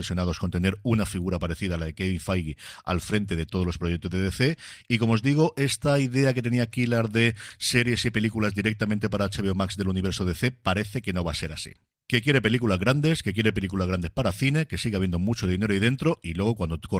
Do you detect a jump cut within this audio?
no; 0 cuts

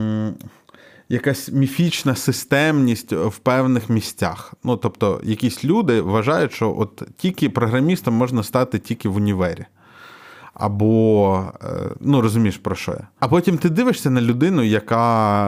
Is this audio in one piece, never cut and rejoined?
yes; 0 cuts

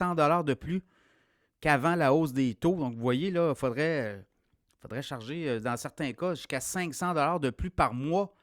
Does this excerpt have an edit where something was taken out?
no; 0 cuts

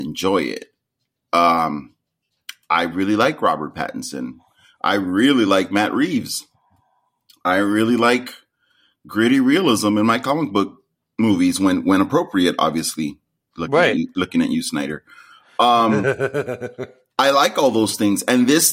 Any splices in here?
no; 0 cuts

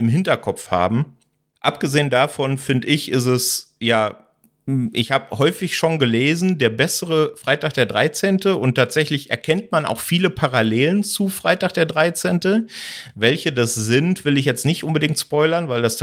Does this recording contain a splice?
no; 0 cuts

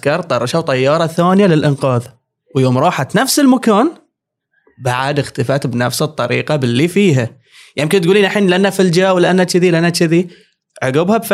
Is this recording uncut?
yes; 0 cuts

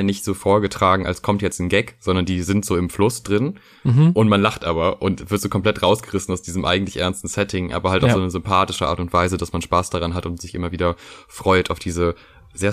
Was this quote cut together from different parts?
no; 0 cuts

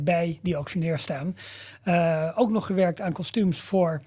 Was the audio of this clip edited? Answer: no; 0 cuts

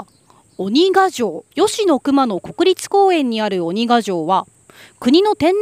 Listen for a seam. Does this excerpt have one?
yes; 1 cut; at 1.5 s

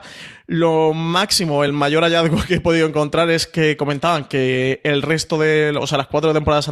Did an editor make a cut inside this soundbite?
no; 0 cuts

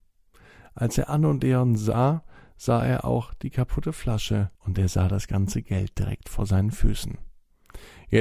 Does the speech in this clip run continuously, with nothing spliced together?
no; 1 cut; at 4.5 s

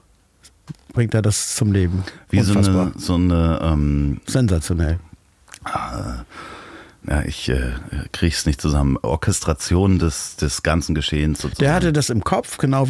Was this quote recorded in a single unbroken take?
yes; 0 cuts

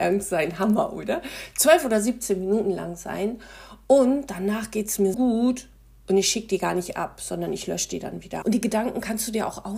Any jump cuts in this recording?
yes; 2 cuts; at 5.1 s, 8.4 s

